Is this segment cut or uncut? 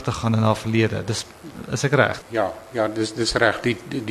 cut